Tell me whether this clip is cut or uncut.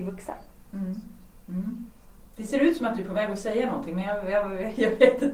uncut